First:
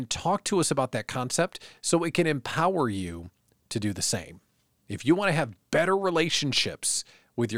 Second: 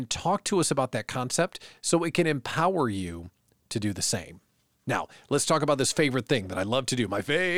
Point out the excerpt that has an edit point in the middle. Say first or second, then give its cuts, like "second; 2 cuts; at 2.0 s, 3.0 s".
first; 1 cut; at 4.7 s